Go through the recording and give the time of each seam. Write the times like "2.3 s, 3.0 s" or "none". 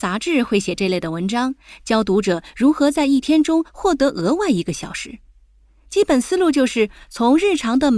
none